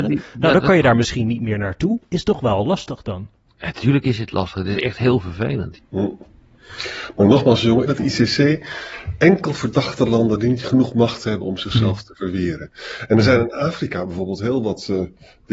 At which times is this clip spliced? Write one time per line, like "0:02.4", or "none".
0:05.8
0:07.9